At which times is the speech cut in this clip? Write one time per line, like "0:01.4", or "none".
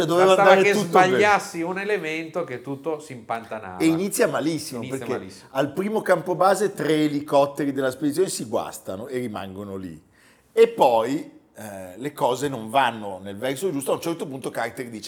none